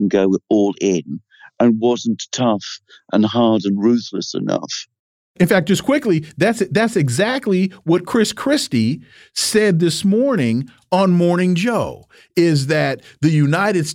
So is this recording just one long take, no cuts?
yes; 0 cuts

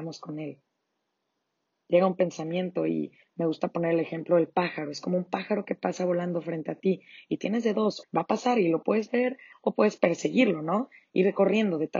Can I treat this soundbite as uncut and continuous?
no; 2 cuts; at 8.0 s, 9.5 s

